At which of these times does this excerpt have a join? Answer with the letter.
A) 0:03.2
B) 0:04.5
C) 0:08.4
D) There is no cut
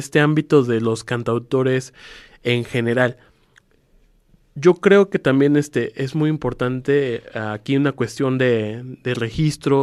D